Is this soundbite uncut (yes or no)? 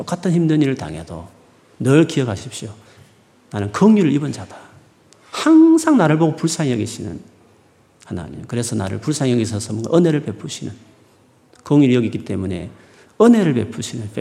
yes